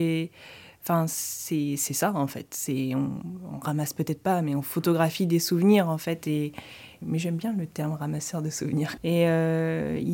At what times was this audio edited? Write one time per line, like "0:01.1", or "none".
0:07.0
0:09.0